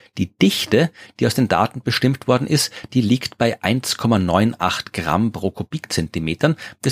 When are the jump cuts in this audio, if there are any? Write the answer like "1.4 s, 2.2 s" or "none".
none